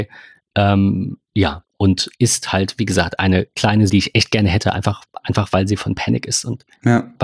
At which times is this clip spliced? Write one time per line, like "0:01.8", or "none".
0:01.2
0:03.9